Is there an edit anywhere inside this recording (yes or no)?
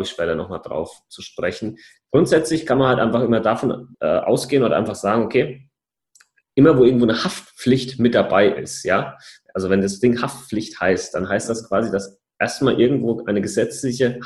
yes